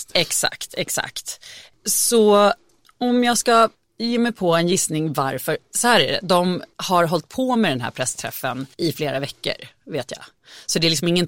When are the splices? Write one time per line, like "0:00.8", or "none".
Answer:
0:06.7
0:08.7